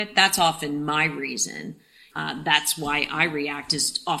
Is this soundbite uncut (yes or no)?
no